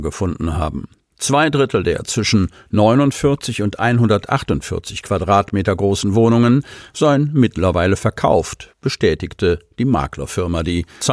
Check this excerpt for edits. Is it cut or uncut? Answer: uncut